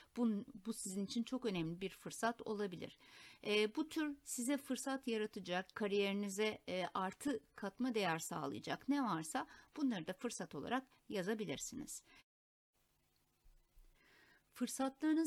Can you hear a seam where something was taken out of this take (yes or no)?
yes